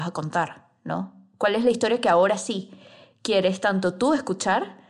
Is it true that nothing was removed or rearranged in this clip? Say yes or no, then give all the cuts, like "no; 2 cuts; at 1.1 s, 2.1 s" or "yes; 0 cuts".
yes; 0 cuts